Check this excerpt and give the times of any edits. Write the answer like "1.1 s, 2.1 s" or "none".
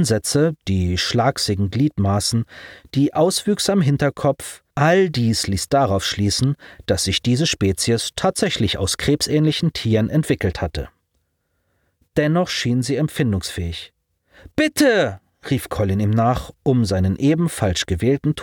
4.7 s